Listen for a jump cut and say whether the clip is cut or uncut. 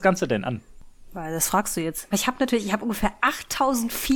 cut